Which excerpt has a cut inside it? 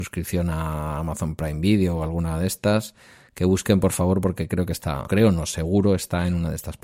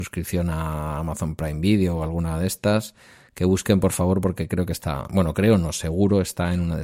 first; 1 cut; at 5.1 s

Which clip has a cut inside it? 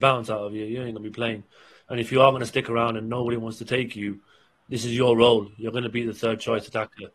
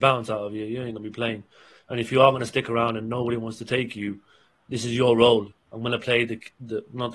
second; 1 cut; at 5.5 s

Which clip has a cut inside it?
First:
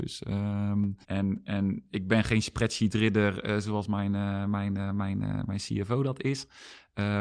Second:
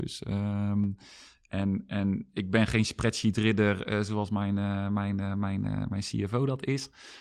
first; 1 cut; at 1.0 s

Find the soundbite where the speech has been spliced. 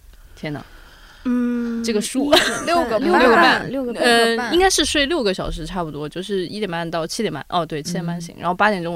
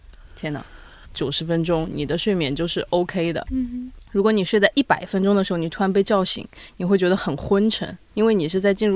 second; 2 cuts; at 1.0 s, 3.5 s

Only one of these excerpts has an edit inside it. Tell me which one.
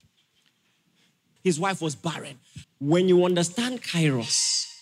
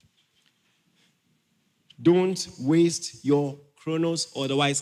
first; 2 cuts; at 1.4 s, 2.6 s

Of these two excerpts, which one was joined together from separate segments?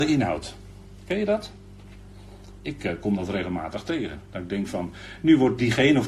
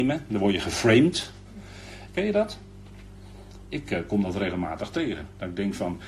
second; 1 cut; at 2.1 s

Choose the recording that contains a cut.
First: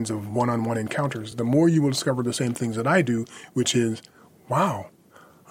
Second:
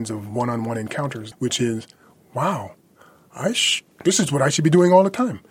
second; 1 cut; at 1.3 s

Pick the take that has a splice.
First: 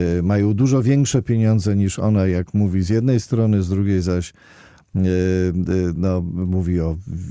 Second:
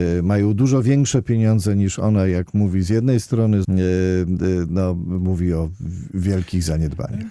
second; 1 cut; at 3.6 s

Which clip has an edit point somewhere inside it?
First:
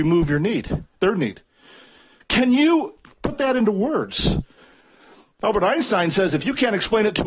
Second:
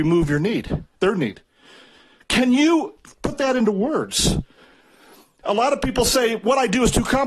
first; 1 cut; at 5.3 s

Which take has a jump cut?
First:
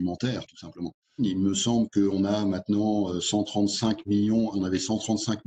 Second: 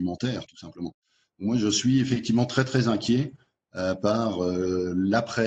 first; 2 cuts; at 1.2 s, 4.5 s

